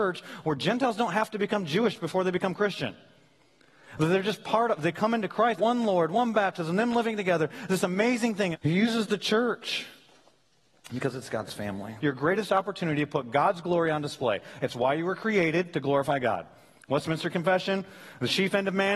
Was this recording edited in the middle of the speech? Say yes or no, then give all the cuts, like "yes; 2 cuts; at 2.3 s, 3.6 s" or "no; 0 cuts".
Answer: yes; 3 cuts; at 5.6 s, 8.5 s, 12.0 s